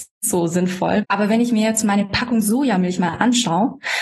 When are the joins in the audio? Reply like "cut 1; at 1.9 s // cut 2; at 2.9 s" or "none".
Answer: cut 1; at 1.0 s

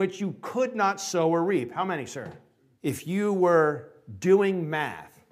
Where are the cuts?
cut 1; at 2.8 s

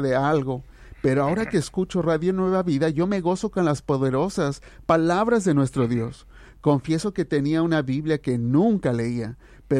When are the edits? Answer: none

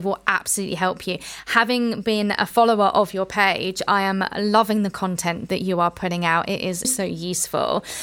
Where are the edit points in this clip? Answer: cut 1; at 5.5 s // cut 2; at 6.8 s

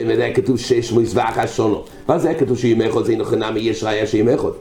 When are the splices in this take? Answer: cut 1; at 3.0 s

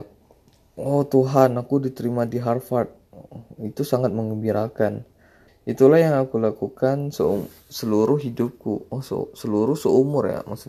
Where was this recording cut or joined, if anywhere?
cut 1; at 5.5 s

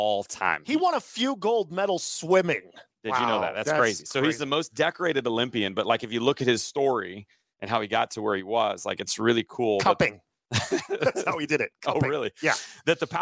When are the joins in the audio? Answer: cut 1; at 2.9 s

